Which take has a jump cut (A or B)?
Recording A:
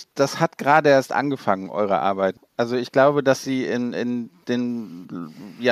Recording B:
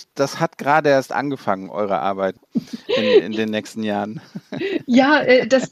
B